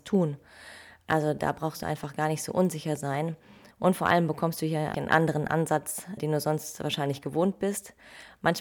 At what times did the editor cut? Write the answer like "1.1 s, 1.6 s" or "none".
3.7 s, 4.9 s, 6.2 s

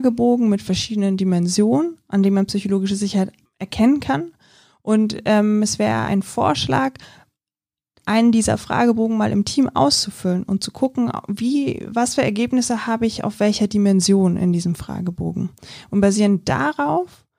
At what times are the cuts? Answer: 6.1 s

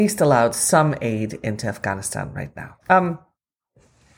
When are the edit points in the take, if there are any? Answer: 2.8 s

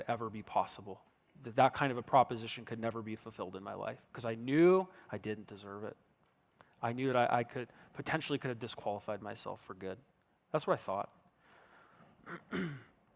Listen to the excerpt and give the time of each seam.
none

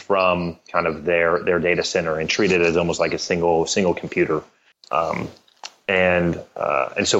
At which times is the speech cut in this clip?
4.7 s

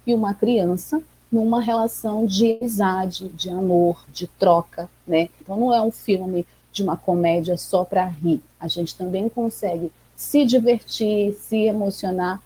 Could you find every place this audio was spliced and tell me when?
5.4 s

